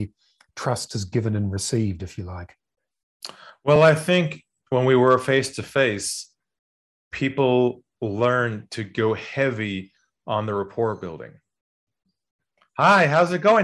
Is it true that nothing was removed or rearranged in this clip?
yes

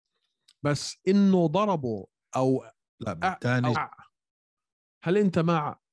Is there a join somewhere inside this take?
yes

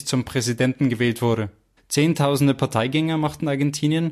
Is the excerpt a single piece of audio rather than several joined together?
no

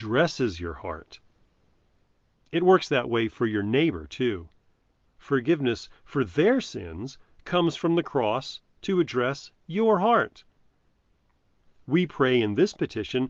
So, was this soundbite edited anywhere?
yes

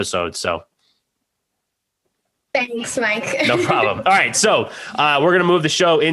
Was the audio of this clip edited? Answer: no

